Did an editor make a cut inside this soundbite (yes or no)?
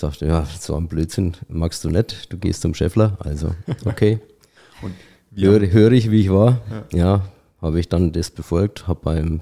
no